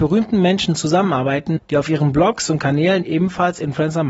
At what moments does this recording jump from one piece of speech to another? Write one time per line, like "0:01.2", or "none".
0:01.6

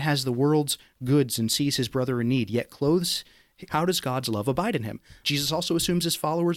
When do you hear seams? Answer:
0:03.7
0:05.2

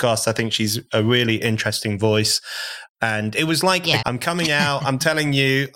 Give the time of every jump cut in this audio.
0:02.9
0:04.0

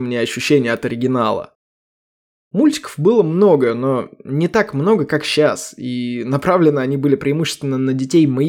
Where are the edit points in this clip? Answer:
none

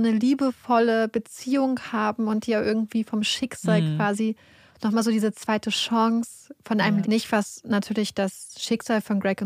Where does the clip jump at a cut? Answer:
0:07.0

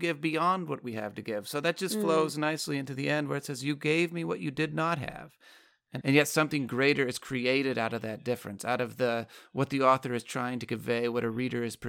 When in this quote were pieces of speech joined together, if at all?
0:06.0

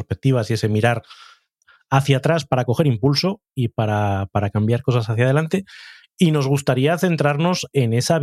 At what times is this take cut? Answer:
none

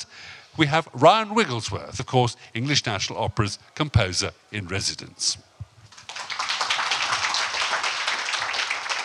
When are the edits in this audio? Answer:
0:02.0

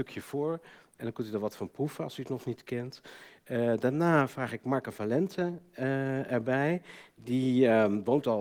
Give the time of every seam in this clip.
0:00.9

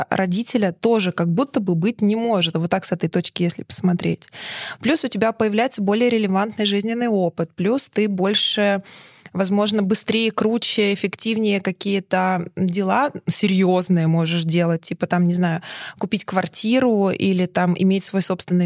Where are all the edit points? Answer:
0:02.5

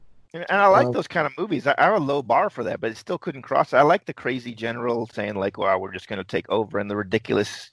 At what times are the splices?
none

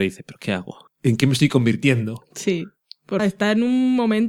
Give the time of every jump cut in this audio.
0:03.2

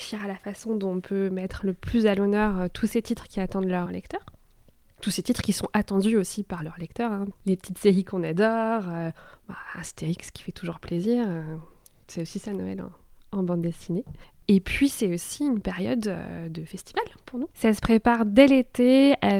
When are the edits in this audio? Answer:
0:03.9
0:17.5

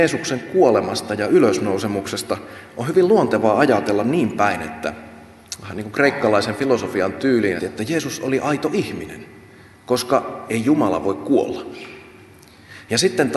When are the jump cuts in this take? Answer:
0:07.6

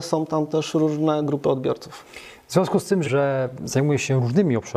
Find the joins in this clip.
0:03.0

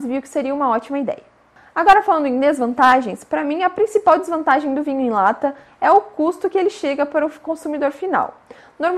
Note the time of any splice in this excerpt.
none

